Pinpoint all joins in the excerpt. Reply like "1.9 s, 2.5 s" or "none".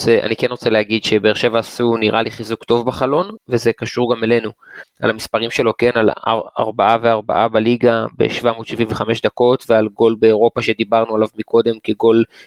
4.8 s